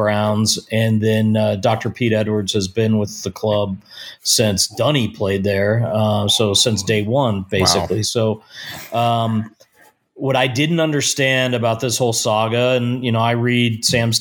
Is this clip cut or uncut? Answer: uncut